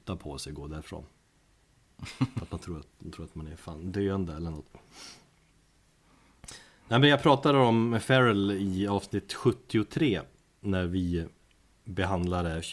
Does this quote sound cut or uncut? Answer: uncut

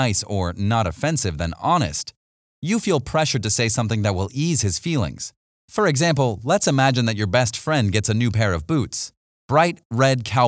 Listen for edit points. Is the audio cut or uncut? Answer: cut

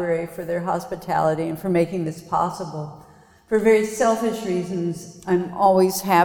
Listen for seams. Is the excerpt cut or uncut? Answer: uncut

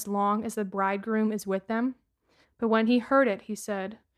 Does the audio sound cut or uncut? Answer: cut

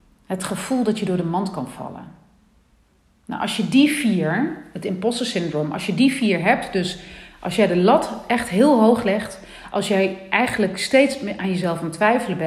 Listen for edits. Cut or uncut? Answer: cut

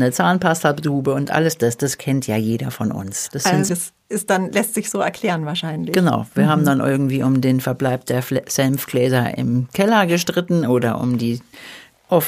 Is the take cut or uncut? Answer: cut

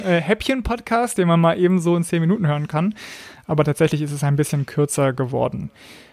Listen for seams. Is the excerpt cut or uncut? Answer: uncut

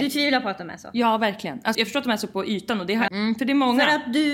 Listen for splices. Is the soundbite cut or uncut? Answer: cut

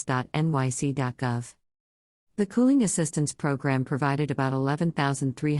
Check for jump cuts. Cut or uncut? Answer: uncut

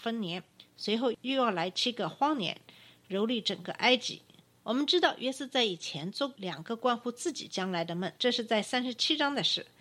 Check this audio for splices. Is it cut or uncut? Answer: cut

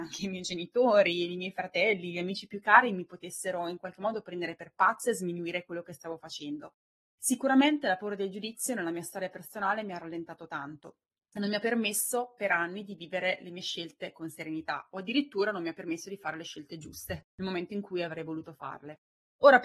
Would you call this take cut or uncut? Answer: uncut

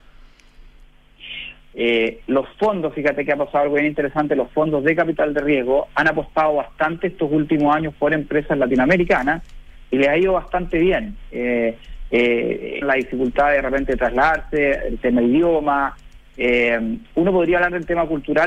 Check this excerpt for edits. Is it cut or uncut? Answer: cut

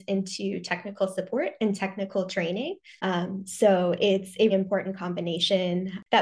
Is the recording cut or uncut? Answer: cut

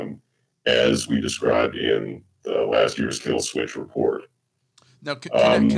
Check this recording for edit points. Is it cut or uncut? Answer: uncut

